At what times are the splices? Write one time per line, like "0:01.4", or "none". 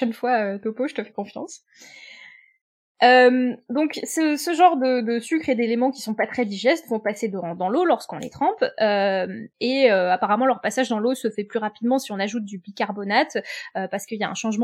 none